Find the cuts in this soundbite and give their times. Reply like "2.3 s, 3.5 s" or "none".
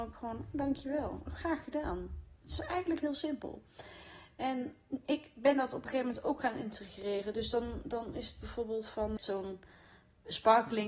2.4 s, 9.2 s